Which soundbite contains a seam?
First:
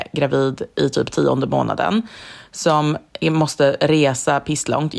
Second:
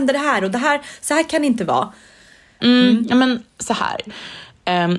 second; 2 cuts; at 2.6 s, 4.1 s

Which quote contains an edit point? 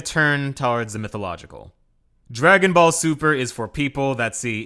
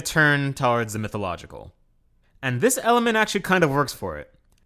first; 1 cut; at 2.2 s

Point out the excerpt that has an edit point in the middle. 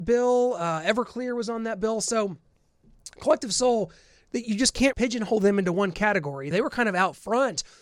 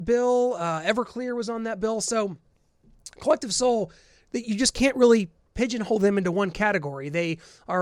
first; 2 cuts; at 4.9 s, 6.5 s

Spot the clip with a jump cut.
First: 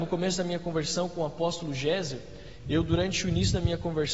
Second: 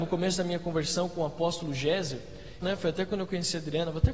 second; 1 cut; at 2.6 s

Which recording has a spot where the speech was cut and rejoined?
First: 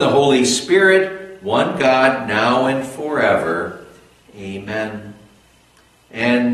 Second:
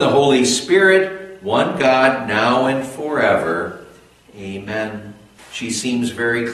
second; 1 cut; at 5.4 s

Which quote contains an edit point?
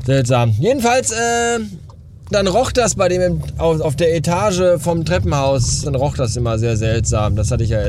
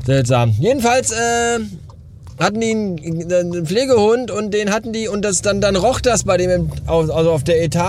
first; 3 cuts; at 2.3 s, 3.8 s, 5.9 s

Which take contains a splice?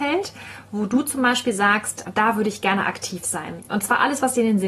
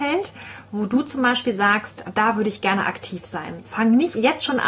second; 1 cut; at 3.6 s

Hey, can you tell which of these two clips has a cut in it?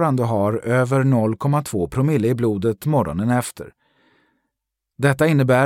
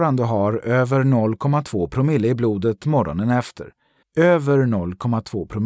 second; 1 cut; at 4.0 s

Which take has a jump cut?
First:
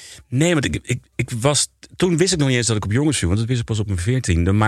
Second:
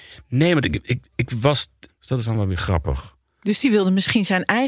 second; 1 cut; at 1.9 s

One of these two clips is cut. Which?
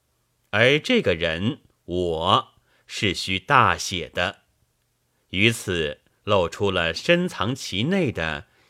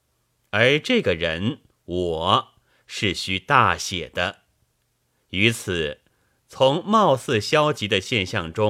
first; 1 cut; at 6.2 s

